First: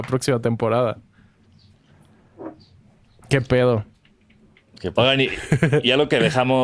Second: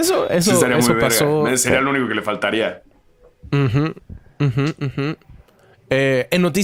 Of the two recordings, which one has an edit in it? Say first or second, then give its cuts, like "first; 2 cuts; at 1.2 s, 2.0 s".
first; 1 cut; at 5.0 s